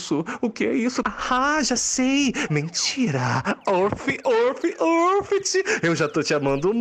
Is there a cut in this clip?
yes; 2 cuts; at 1.0 s, 2.5 s

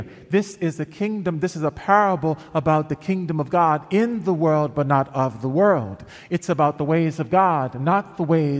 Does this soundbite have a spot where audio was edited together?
no; 0 cuts

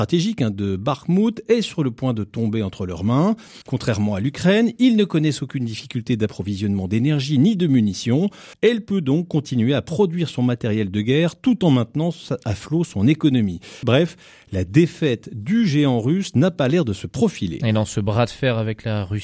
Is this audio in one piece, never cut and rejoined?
no; 3 cuts; at 3.6 s, 8.5 s, 13.8 s

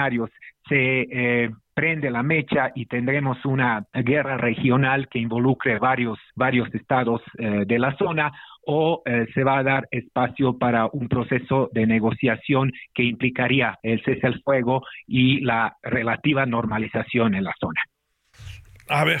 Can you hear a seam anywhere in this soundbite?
yes; 3 cuts; at 3.9 s, 6.3 s, 13.8 s

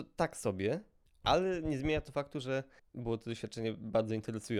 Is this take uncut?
yes; 0 cuts

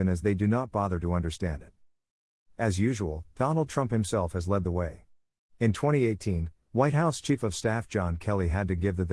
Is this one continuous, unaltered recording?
yes; 0 cuts

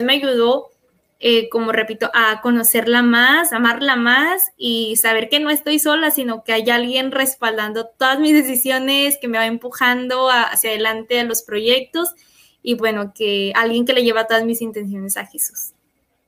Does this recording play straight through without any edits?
no; 1 cut; at 12.8 s

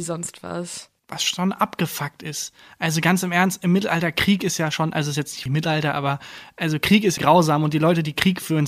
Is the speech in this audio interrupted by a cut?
yes; 2 cuts; at 5.5 s, 7.2 s

